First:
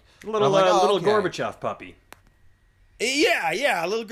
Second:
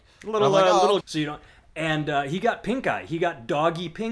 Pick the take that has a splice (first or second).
second